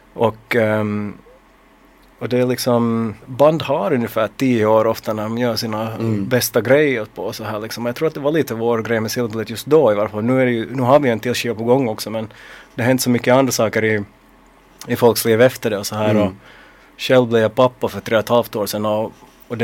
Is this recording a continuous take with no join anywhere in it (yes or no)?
no